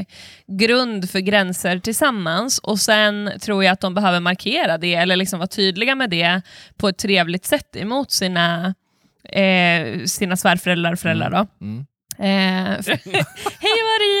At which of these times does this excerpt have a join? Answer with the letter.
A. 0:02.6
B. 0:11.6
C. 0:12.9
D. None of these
C